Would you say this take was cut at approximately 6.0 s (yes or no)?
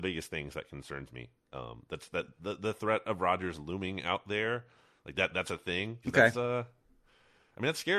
yes